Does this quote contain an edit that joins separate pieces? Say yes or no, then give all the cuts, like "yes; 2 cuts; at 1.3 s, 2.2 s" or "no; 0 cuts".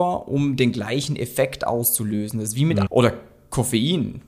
yes; 1 cut; at 2.9 s